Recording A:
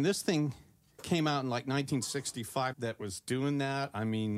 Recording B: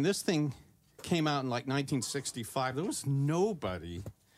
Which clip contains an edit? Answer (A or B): A